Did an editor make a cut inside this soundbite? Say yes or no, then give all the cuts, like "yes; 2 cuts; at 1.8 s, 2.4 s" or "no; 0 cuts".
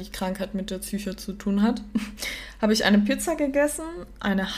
no; 0 cuts